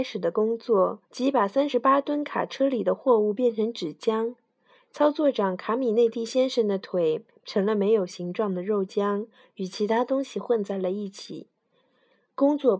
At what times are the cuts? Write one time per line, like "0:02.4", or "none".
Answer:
0:01.0
0:04.9